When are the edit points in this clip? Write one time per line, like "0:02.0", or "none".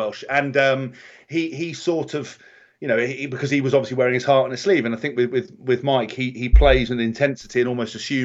none